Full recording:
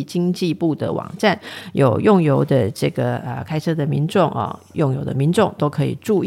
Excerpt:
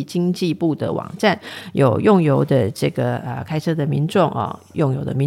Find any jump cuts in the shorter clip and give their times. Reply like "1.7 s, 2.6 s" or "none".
none